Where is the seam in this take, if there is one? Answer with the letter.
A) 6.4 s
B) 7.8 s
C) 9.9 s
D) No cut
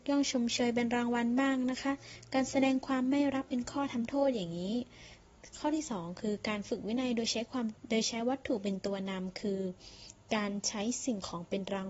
B